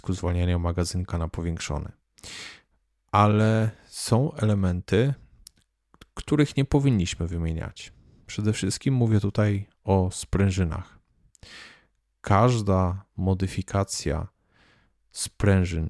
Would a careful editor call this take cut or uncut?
uncut